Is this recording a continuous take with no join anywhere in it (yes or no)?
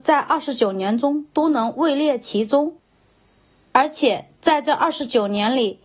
yes